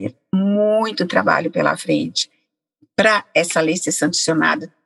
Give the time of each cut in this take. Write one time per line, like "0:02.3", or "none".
none